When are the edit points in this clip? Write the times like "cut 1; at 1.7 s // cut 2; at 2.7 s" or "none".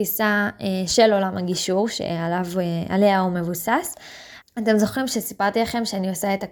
cut 1; at 4.4 s